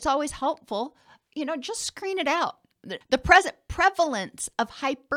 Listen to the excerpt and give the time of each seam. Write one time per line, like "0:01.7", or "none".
0:03.0